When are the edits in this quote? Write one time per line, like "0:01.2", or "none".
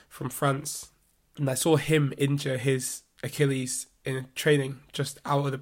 0:01.4